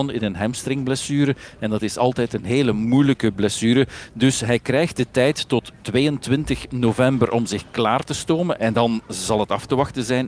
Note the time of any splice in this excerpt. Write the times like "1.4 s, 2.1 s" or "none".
none